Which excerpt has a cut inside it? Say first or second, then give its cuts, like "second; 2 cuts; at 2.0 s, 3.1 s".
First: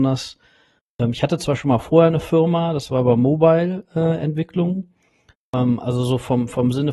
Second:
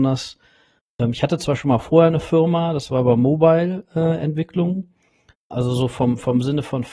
second; 1 cut; at 5.5 s